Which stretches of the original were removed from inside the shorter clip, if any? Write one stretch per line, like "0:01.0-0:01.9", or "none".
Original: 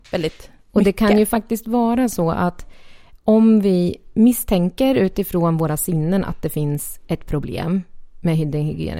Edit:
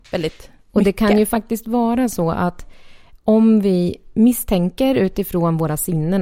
none